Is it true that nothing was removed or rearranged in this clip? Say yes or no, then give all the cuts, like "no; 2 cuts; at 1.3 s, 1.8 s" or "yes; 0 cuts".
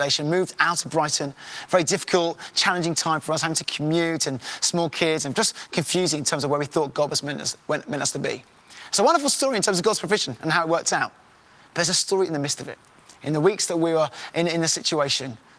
yes; 0 cuts